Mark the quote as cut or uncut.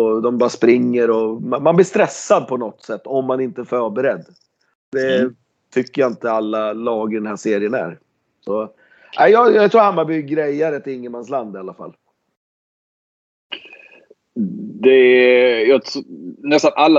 uncut